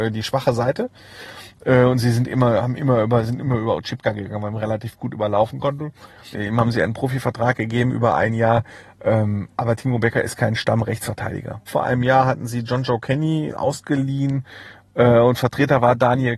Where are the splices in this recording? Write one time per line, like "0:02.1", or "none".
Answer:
0:06.3
0:11.7
0:13.5

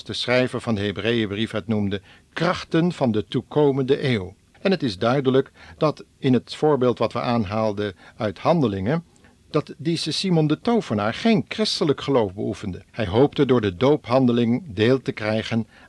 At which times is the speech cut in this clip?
0:04.5
0:12.9

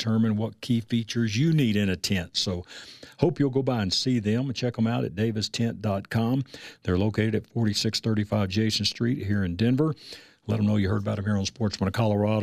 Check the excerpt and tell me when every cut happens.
none

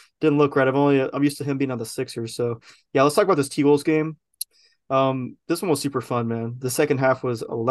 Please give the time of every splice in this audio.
none

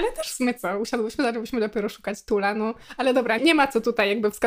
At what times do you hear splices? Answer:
0:03.4

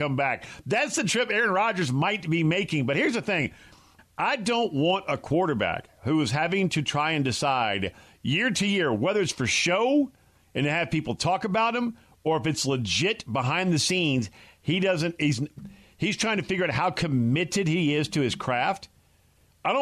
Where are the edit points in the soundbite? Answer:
0:04.0

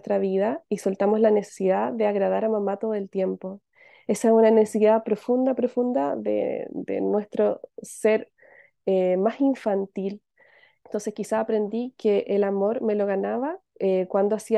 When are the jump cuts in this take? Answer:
0:10.8

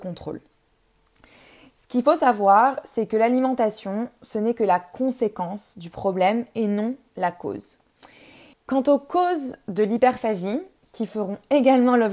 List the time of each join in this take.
0:08.5

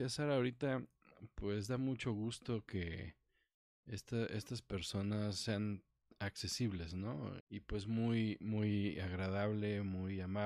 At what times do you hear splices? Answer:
0:07.4

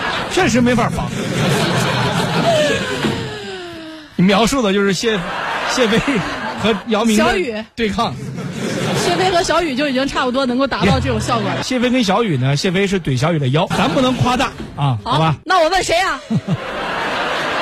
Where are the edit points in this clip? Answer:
0:11.6
0:13.7
0:15.4

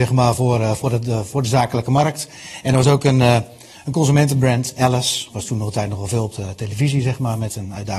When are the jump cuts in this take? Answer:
0:05.3

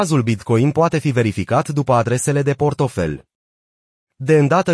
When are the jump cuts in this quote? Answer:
none

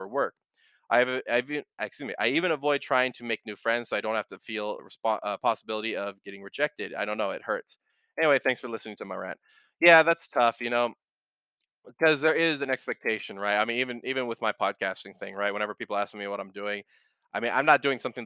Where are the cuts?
0:04.8

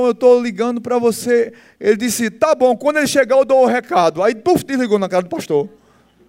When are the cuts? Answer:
none

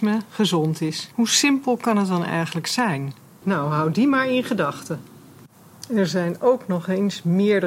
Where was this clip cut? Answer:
0:01.1
0:03.4

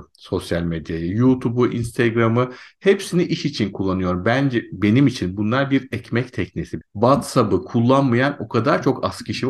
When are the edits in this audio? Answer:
0:06.8

